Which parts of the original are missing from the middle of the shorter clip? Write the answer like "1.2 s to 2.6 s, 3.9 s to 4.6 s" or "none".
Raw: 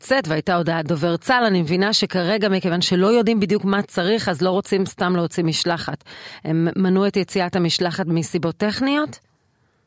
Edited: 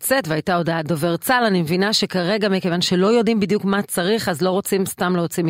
none